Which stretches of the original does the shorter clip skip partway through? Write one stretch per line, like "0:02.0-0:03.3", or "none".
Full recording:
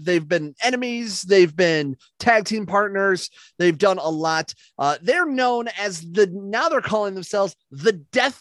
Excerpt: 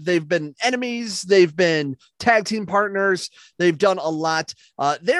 none